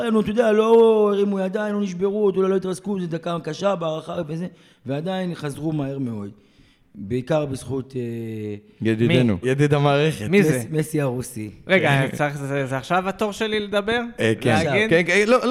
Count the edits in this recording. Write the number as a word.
one